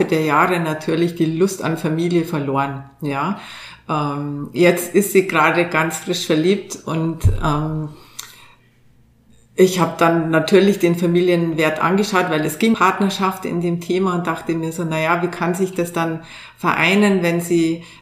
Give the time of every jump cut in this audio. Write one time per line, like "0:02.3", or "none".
0:12.7